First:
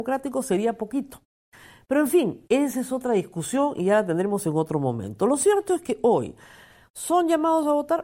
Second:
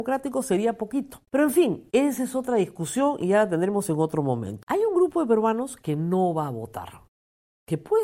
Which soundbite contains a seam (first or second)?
second